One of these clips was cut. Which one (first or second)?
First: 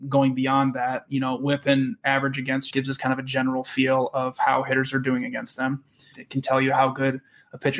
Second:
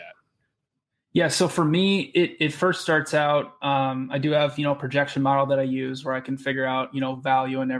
first